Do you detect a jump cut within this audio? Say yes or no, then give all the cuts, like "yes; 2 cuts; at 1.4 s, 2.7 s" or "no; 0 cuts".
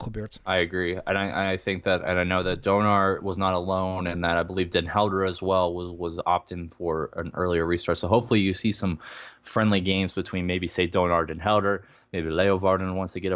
no; 0 cuts